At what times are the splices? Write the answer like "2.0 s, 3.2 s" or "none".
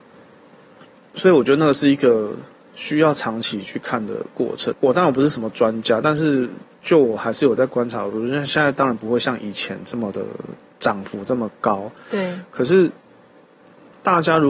4.7 s